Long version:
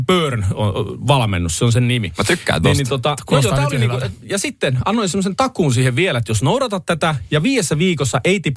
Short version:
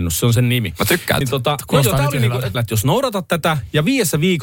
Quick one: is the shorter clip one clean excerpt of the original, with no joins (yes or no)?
no